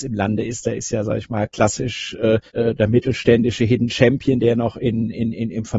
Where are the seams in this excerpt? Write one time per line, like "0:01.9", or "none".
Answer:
0:02.5